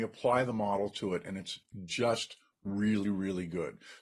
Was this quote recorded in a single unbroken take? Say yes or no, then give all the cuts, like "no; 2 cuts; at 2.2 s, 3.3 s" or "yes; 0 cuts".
yes; 0 cuts